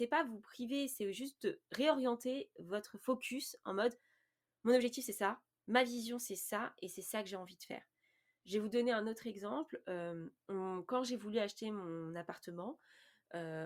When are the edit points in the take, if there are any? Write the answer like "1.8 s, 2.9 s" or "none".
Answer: 10.4 s